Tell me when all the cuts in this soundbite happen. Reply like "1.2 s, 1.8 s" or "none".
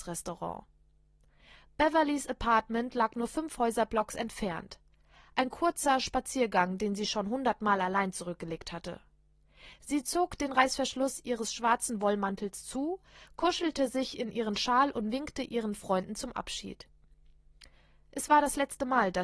none

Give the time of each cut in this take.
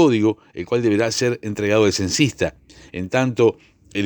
2.9 s

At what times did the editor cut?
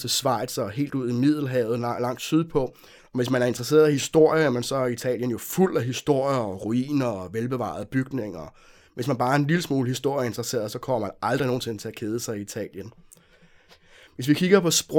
3.0 s

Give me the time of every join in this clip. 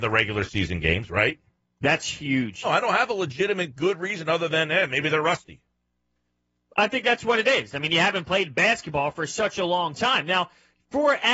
2.6 s

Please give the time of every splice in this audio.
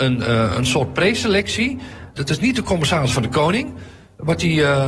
2.2 s

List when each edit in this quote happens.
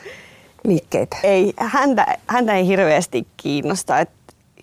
none

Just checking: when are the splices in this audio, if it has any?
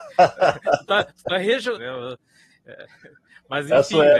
1.8 s

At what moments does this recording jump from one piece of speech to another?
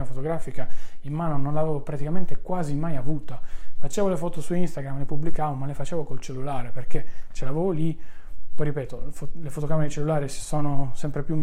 none

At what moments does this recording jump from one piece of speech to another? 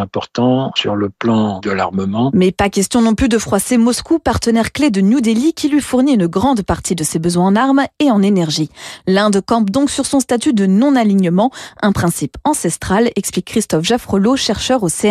none

